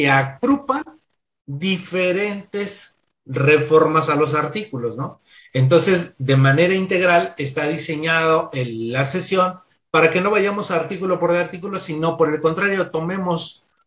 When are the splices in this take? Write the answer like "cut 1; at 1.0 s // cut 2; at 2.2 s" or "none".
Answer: none